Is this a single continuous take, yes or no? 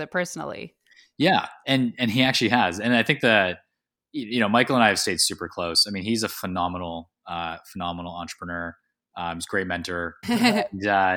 no